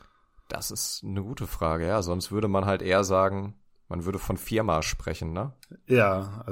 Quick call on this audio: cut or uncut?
uncut